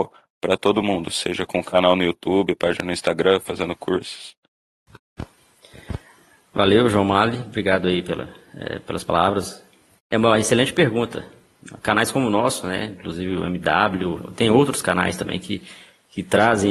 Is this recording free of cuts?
yes; 0 cuts

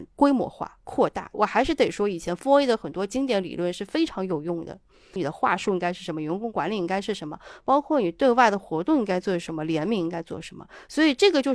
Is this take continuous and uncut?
no; 1 cut; at 5.2 s

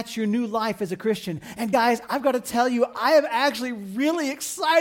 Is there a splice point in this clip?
no; 0 cuts

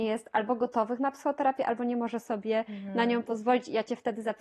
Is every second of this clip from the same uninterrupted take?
yes; 0 cuts

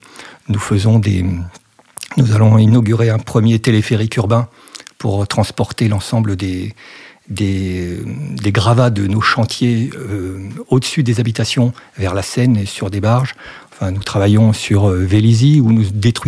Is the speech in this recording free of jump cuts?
yes; 0 cuts

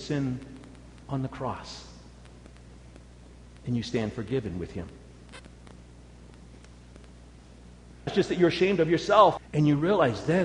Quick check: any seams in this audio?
yes; 2 cuts; at 8.1 s, 9.4 s

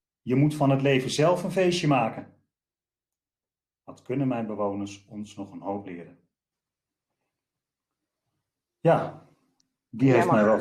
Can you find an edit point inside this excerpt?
no; 0 cuts

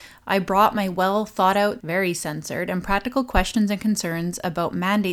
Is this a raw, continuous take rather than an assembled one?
no; 1 cut; at 1.8 s

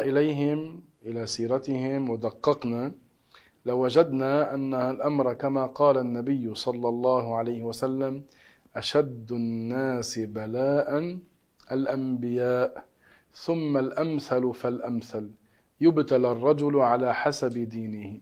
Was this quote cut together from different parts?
no; 0 cuts

